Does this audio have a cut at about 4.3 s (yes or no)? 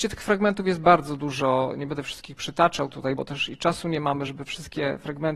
yes